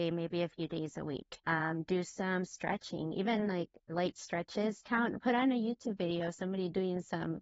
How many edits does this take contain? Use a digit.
1